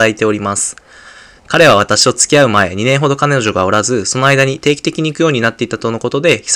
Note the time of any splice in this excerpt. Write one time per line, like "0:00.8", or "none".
0:01.4